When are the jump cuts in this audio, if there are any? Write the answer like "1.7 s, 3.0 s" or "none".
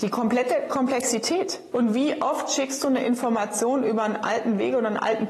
1.7 s